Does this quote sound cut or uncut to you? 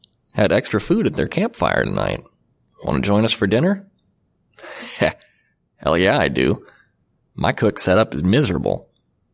uncut